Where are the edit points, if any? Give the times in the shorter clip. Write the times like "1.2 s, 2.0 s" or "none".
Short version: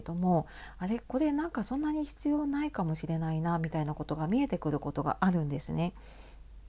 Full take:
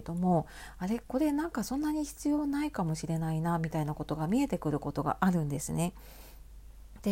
none